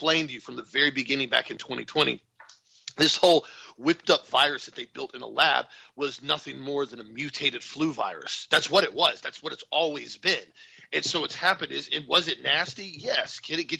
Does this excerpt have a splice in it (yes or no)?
no